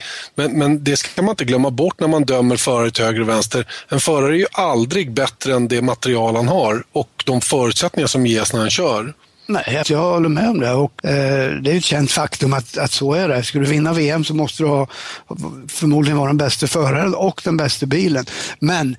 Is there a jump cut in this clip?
yes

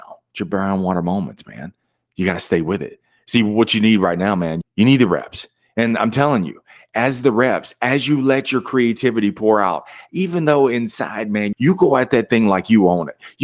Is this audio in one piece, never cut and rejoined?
no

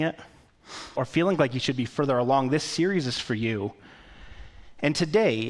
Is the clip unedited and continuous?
no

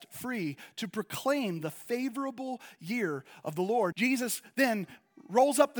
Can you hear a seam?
yes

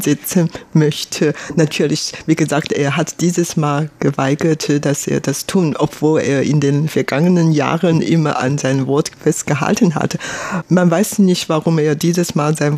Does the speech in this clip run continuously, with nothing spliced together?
yes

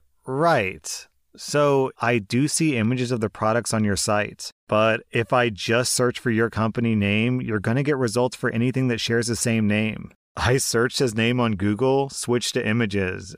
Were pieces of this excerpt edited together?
yes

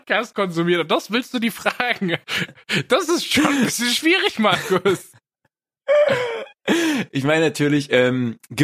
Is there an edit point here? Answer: no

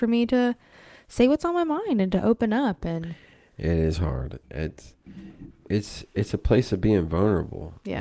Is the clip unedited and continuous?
no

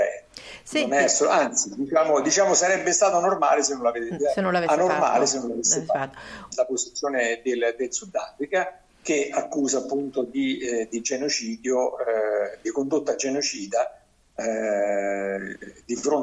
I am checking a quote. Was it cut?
yes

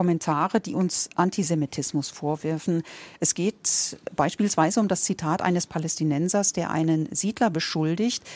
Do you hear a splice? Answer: no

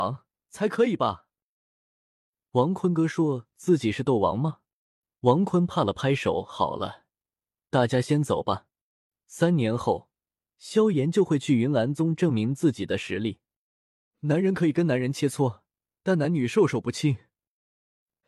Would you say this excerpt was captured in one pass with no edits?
no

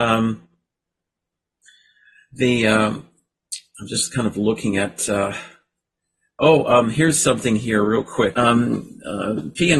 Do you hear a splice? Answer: yes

